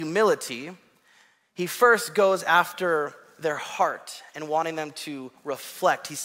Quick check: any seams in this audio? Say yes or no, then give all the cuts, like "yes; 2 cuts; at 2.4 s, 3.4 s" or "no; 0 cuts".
no; 0 cuts